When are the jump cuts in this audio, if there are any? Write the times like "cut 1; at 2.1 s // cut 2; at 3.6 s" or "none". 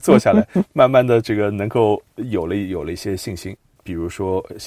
cut 1; at 3.8 s